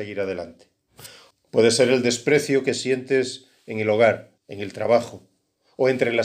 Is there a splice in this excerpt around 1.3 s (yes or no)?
yes